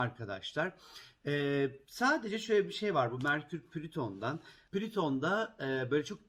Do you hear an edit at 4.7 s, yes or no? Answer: yes